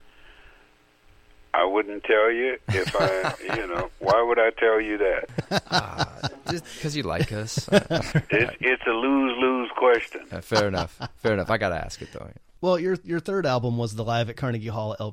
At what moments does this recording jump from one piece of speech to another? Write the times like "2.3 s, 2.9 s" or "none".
8.1 s